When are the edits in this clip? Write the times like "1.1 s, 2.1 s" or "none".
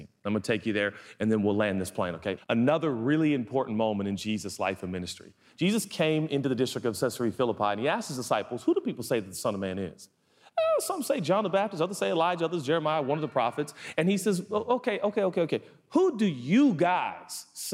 2.4 s